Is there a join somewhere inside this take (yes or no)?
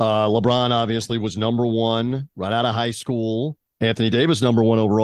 yes